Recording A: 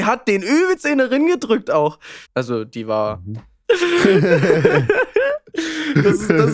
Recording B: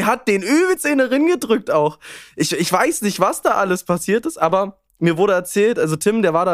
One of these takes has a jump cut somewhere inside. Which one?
A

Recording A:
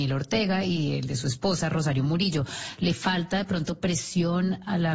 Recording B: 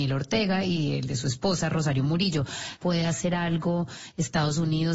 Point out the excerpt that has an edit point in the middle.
B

